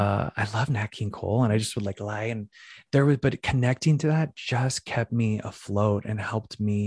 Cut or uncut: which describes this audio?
uncut